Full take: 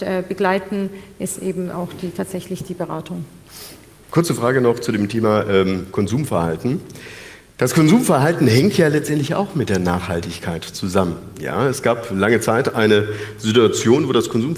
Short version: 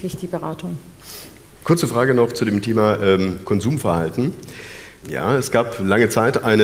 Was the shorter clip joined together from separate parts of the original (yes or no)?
yes